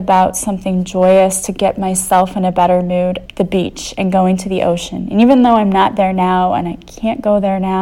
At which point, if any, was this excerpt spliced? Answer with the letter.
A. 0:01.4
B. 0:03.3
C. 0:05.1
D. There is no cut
B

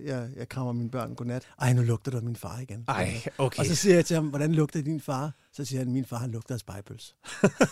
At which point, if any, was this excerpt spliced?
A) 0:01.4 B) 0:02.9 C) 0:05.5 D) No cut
A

